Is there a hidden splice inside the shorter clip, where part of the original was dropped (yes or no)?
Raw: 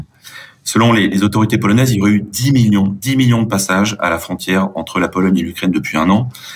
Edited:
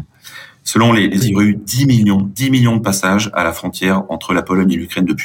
yes